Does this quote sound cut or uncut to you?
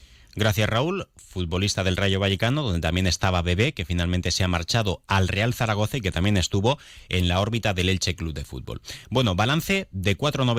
uncut